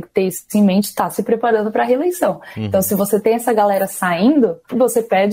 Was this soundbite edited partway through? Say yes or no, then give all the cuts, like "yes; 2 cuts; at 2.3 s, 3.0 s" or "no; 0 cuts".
no; 0 cuts